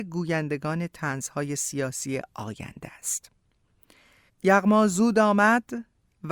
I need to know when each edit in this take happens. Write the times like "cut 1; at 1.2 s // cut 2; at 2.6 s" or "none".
cut 1; at 4.3 s